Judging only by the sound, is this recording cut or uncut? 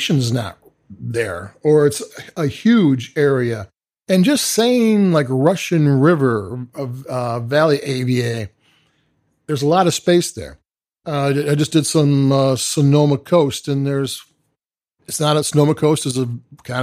uncut